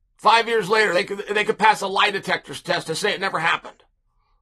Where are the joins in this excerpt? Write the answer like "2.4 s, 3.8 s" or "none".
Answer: none